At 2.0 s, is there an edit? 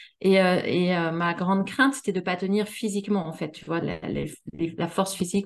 no; 1 cut; at 3.8 s

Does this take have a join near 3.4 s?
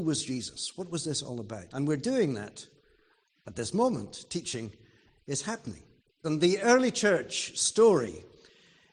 no; 2 cuts; at 1.7 s, 6.2 s

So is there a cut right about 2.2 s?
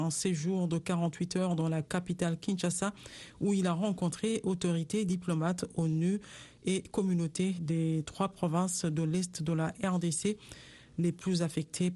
no; 1 cut; at 7.6 s

